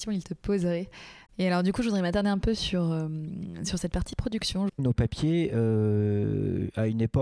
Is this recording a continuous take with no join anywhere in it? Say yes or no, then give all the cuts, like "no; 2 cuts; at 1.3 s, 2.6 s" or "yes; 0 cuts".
no; 2 cuts; at 1.3 s, 4.7 s